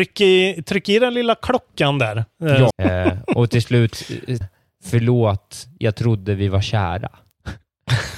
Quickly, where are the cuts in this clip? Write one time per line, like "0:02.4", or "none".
0:02.7
0:04.4